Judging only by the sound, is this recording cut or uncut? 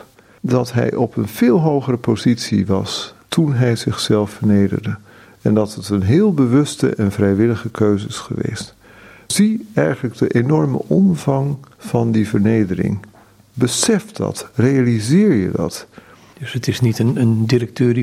uncut